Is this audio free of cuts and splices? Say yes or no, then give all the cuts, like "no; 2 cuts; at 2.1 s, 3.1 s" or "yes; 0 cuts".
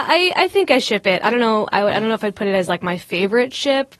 yes; 0 cuts